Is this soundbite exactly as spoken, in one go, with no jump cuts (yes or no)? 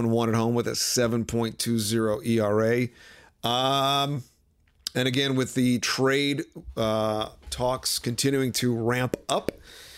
yes